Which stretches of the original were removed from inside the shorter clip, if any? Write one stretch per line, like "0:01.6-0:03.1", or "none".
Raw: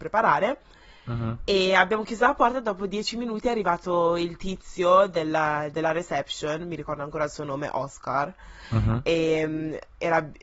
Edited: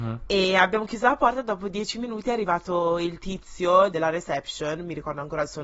0:05.1-0:05.7